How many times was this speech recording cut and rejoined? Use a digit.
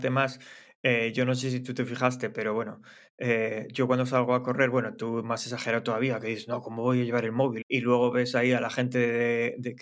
1